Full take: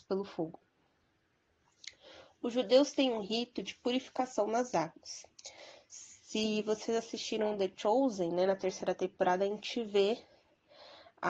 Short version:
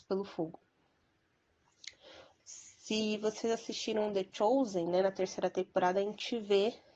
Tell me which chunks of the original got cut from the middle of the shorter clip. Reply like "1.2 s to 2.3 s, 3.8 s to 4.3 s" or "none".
2.4 s to 5.8 s